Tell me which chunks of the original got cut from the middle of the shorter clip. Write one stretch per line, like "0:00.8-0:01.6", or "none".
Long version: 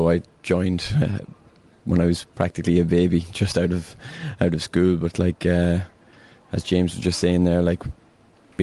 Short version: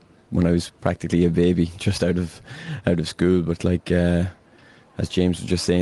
none